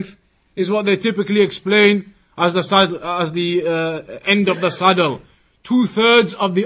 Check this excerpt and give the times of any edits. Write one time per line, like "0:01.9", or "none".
none